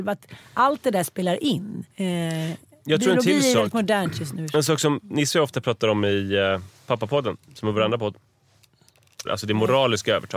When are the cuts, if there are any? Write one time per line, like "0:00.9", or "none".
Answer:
0:01.9
0:09.3